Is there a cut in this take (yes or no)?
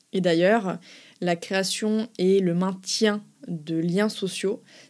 no